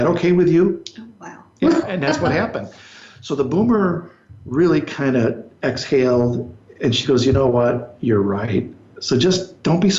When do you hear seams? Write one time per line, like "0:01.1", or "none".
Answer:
0:01.8